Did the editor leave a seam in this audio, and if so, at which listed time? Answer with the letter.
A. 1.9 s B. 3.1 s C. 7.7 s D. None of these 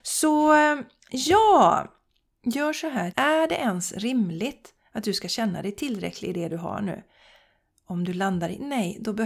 B